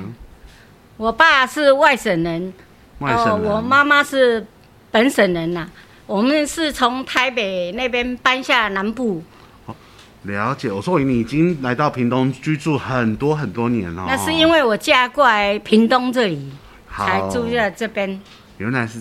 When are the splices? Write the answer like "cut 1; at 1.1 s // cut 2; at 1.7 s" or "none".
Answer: cut 1; at 9.7 s